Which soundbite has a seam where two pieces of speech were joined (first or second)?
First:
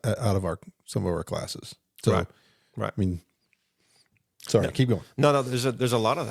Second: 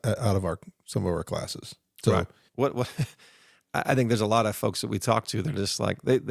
second